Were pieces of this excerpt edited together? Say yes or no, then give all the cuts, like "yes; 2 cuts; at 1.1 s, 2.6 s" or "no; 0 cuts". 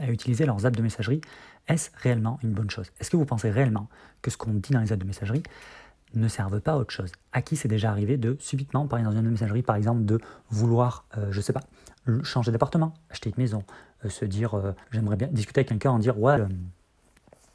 yes; 2 cuts; at 14.8 s, 16.4 s